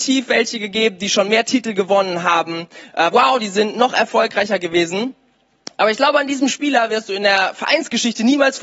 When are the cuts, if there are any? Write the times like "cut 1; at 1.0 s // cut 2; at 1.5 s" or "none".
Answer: cut 1; at 3.1 s